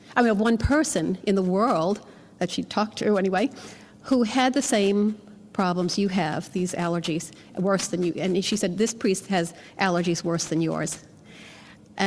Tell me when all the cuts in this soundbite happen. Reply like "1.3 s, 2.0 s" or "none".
none

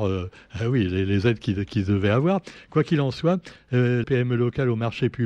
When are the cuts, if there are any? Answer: 4.0 s

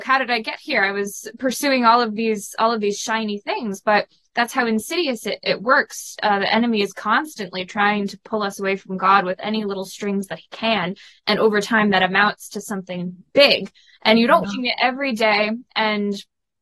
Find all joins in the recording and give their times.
14.4 s

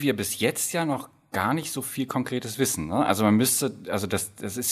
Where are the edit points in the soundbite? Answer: none

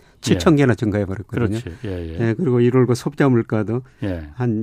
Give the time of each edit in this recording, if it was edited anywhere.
none

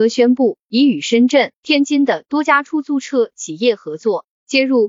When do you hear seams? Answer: 1.6 s

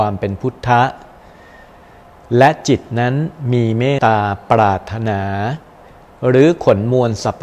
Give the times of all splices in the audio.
4.0 s

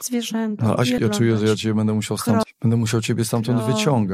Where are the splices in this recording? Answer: 1.0 s, 2.4 s

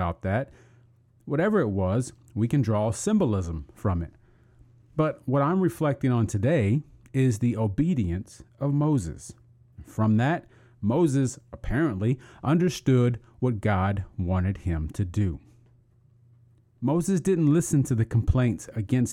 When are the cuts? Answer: 9.7 s

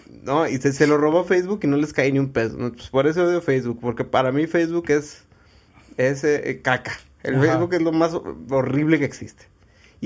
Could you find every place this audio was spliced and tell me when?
none

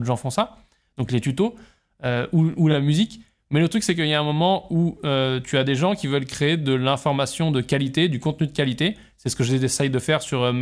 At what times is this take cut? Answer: none

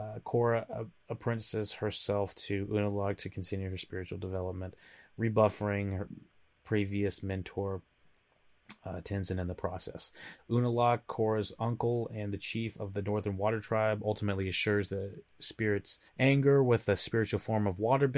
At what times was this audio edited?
10.4 s, 16.1 s

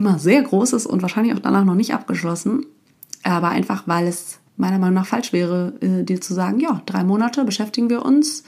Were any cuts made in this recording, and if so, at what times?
4.5 s

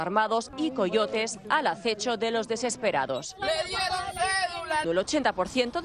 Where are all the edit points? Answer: 4.8 s

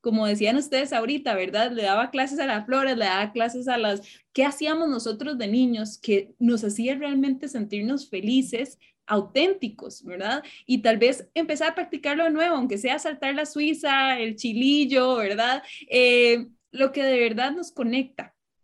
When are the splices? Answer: 4.2 s

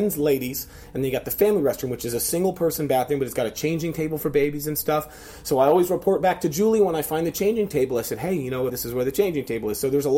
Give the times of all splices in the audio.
8.7 s

